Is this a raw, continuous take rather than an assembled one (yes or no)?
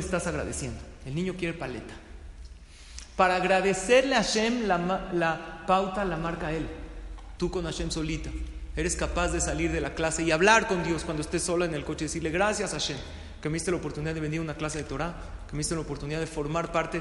no